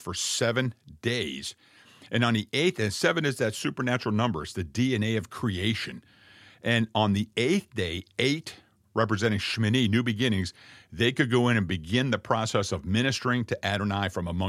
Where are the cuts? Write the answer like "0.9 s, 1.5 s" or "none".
none